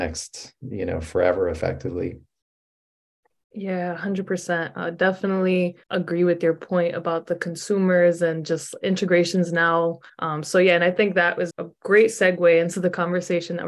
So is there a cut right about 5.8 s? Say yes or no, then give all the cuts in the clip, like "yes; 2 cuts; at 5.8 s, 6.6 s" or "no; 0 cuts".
yes; 3 cuts; at 5.8 s, 10.1 s, 11.5 s